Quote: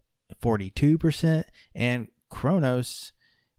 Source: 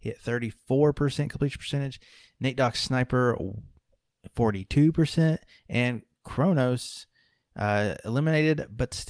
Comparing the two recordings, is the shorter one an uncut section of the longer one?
yes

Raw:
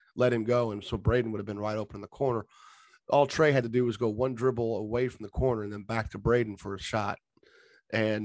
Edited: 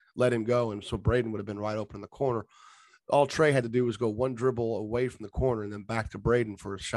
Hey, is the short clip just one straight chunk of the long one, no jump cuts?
yes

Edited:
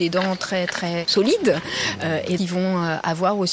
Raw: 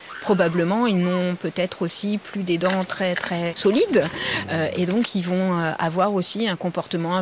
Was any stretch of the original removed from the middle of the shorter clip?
yes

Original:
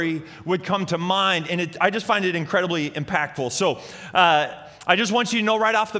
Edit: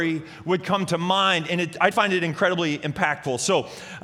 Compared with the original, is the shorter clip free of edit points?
no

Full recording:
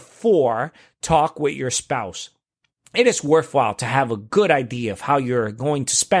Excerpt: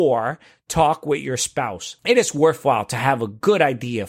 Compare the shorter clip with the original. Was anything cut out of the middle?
yes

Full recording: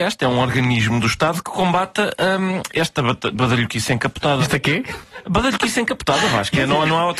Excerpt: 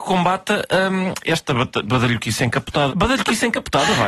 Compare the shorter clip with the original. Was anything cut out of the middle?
yes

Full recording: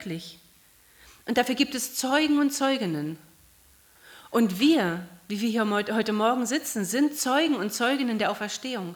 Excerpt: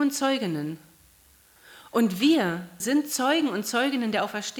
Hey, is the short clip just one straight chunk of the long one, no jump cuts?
no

